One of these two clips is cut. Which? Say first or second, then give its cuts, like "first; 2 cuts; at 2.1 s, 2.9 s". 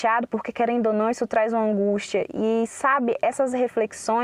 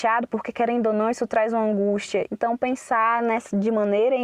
second; 1 cut; at 2.3 s